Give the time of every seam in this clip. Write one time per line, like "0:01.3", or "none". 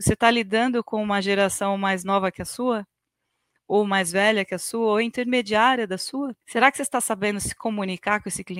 0:06.4